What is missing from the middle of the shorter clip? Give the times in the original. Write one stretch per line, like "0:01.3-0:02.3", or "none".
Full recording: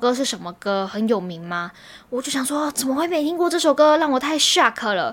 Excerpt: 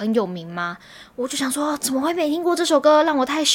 none